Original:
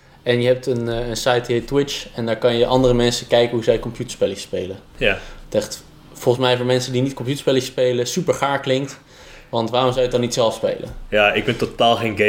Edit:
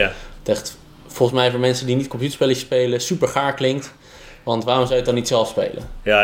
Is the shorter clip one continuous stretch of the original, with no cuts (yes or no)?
yes